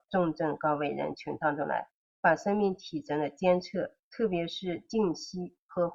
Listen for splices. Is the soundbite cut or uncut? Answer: uncut